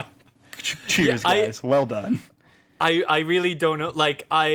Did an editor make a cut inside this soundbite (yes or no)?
no